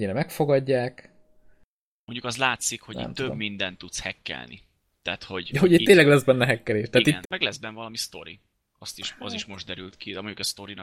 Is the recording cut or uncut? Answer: cut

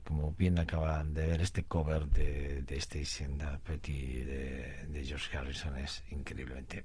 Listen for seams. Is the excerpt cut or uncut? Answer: cut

